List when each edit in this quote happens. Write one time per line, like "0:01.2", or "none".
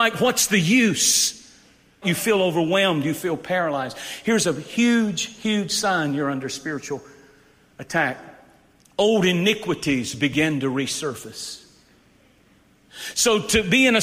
0:02.0
0:13.1